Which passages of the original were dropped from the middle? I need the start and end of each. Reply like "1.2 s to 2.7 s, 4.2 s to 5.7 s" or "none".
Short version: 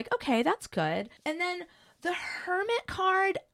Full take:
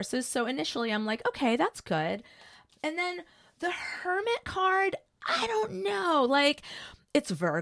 2.3 s to 2.7 s

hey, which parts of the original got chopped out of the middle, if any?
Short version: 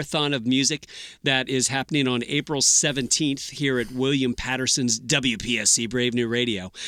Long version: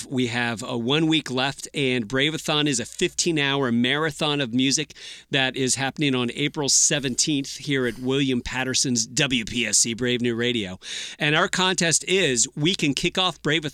none

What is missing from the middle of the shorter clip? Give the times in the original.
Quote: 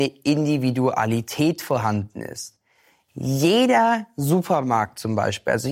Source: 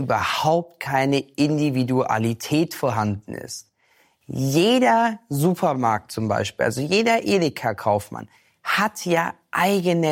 none

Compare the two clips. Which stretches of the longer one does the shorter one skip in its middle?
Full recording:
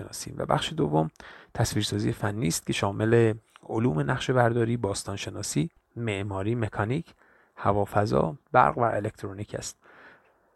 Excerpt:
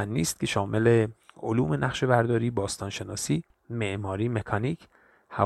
none

